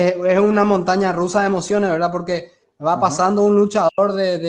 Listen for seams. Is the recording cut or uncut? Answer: uncut